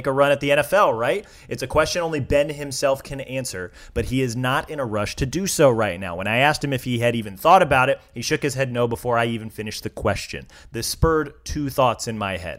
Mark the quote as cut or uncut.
uncut